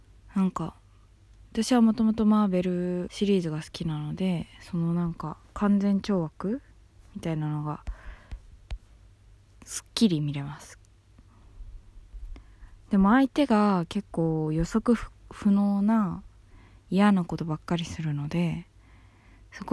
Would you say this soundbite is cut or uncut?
uncut